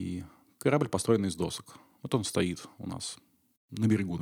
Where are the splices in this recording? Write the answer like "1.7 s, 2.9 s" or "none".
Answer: none